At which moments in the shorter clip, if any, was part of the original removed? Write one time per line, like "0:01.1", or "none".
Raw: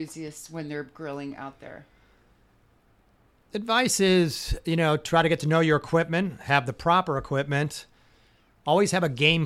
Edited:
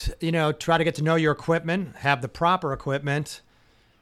none